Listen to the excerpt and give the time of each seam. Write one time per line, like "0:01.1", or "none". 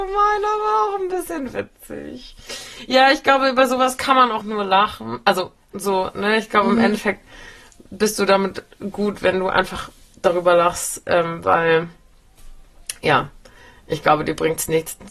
0:04.4